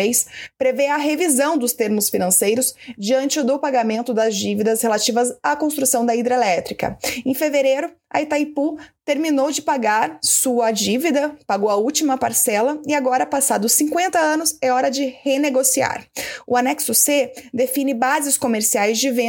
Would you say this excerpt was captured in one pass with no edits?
yes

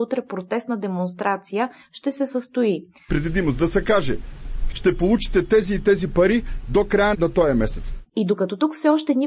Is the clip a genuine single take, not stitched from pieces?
no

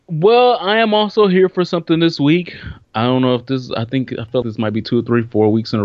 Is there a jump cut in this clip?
yes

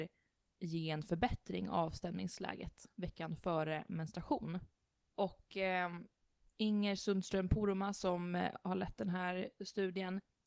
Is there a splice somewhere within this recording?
no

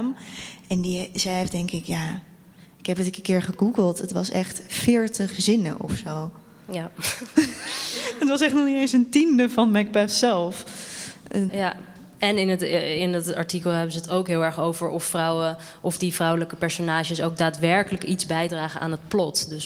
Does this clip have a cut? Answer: yes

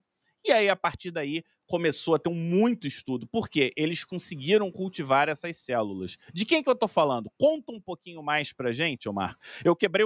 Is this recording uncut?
yes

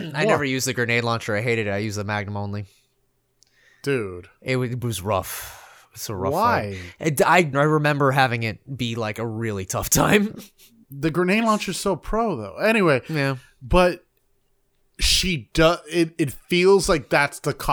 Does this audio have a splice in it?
yes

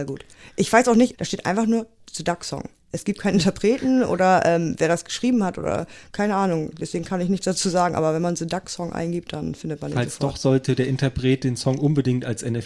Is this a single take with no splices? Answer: no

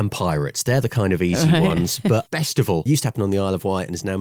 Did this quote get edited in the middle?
yes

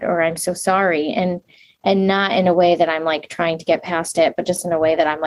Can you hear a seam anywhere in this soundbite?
no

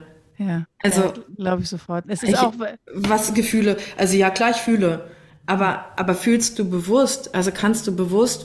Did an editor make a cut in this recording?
no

